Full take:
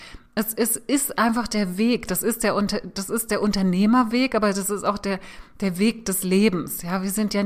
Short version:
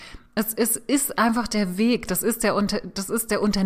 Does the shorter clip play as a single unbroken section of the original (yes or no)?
yes